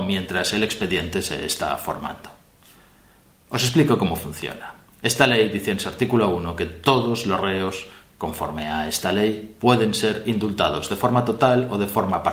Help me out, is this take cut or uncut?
uncut